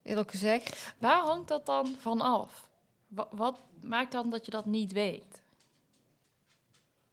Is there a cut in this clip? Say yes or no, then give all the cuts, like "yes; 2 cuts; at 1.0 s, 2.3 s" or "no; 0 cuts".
no; 0 cuts